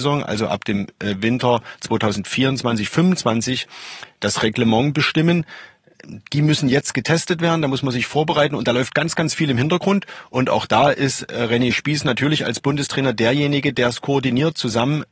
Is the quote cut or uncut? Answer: uncut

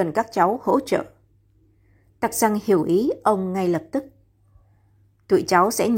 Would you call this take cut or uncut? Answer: uncut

